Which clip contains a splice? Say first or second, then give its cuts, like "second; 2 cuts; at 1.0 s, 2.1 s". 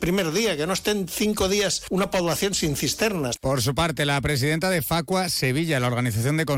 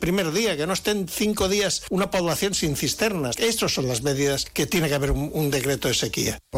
first; 1 cut; at 3.4 s